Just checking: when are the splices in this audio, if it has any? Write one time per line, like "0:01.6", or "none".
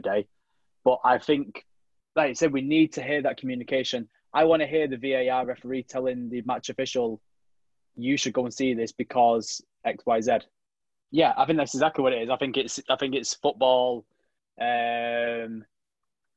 0:11.1